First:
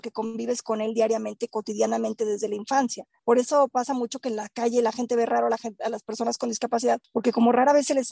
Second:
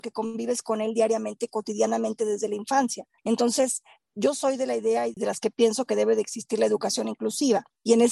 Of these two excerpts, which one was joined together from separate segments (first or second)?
second